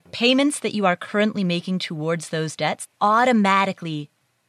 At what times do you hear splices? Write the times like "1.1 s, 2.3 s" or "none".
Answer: 2.9 s

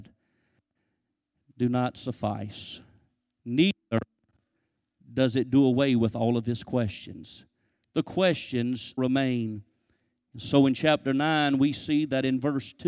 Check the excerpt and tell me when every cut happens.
9.0 s

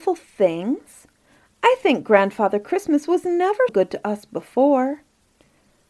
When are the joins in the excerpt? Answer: 3.7 s

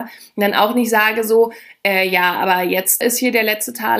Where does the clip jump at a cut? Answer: 3.0 s

